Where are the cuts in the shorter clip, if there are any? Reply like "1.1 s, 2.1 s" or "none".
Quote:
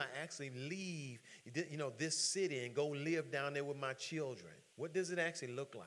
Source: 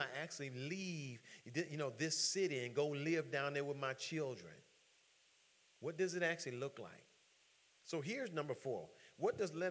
4.7 s